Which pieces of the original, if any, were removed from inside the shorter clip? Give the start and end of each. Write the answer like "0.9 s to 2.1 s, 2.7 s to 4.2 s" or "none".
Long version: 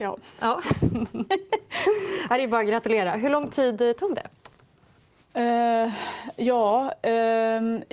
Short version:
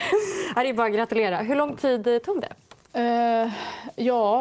4.6 s to 5.3 s